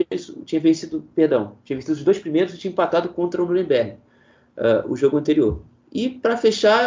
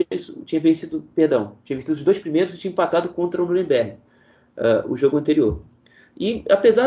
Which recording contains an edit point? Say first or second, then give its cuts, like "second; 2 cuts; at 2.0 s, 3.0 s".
first; 1 cut; at 5.8 s